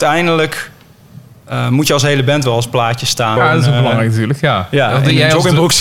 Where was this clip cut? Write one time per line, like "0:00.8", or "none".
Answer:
0:03.4